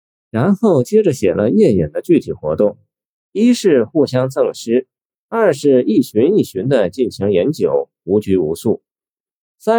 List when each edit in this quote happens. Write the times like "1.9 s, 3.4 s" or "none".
none